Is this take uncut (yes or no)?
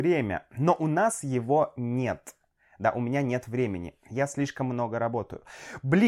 yes